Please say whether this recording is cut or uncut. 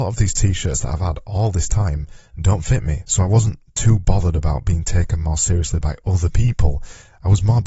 cut